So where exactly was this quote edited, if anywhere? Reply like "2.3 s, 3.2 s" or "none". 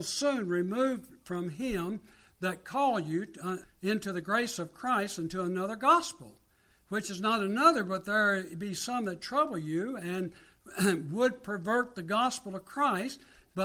3.6 s